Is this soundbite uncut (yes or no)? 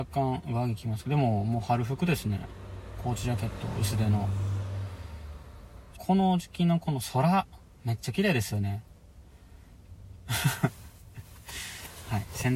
no